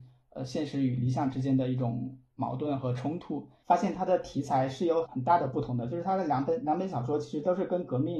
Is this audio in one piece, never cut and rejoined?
no; 1 cut; at 3.6 s

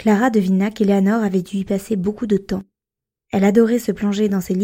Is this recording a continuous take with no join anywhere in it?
no; 1 cut; at 3.2 s

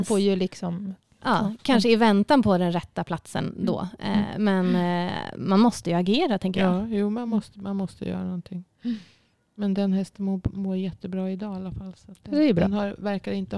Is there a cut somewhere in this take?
no; 0 cuts

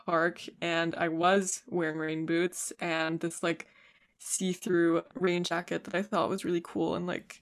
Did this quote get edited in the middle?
no; 0 cuts

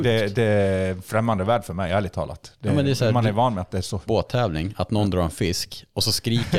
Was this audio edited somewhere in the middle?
yes; 1 cut; at 4.1 s

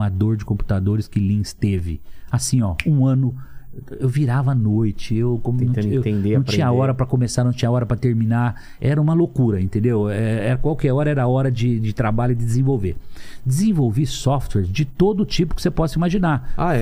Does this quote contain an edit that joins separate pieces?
no; 0 cuts

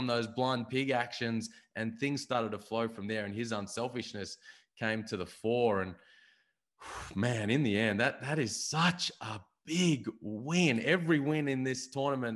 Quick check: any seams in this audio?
no; 0 cuts

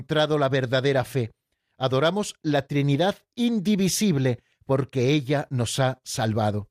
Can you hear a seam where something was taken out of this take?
no; 0 cuts

